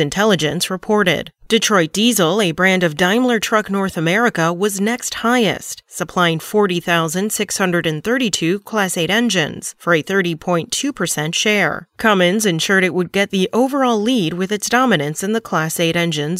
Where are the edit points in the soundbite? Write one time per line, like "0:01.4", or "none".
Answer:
none